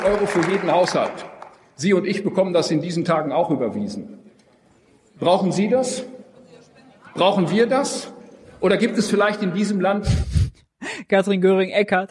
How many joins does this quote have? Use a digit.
0